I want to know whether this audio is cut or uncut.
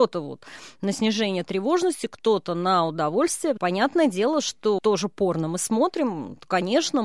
cut